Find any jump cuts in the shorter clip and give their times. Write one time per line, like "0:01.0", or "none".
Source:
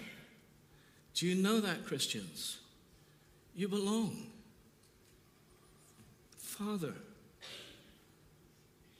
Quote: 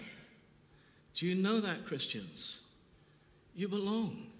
none